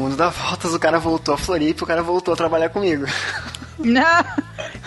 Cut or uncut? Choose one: uncut